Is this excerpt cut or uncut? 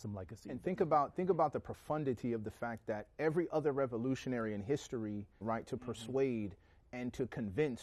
cut